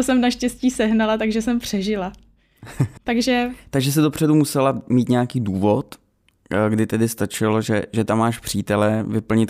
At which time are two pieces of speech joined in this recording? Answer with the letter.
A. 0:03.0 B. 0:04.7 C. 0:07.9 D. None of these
A